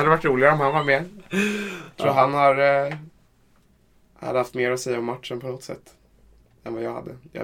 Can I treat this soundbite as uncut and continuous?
yes; 0 cuts

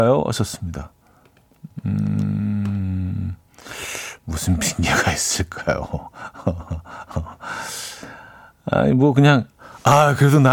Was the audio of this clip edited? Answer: no; 0 cuts

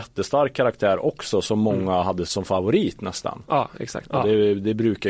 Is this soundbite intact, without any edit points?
no; 2 cuts; at 2.2 s, 4.0 s

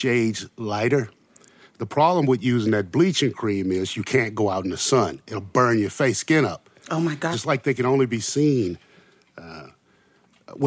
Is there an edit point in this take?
yes; 1 cut; at 7.3 s

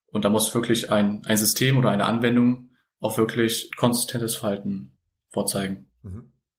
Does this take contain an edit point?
yes; 1 cut; at 3.7 s

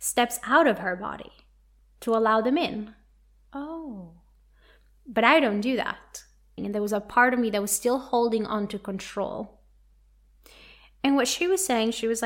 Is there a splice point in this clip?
yes; 1 cut; at 6.6 s

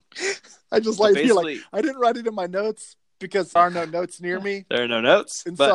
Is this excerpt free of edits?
no; 1 cut; at 3.6 s

